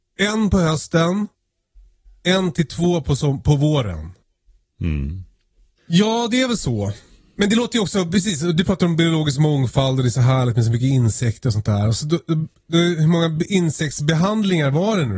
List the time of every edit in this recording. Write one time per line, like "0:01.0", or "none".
0:05.8